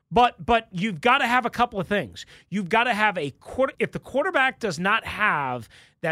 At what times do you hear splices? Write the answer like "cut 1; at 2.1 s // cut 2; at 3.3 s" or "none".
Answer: cut 1; at 3.7 s